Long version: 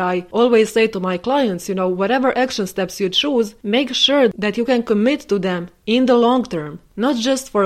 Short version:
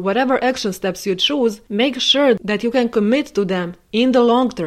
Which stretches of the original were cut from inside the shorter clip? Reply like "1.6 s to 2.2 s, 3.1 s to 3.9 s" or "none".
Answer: none